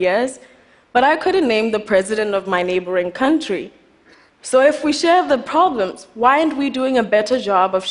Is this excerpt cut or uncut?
cut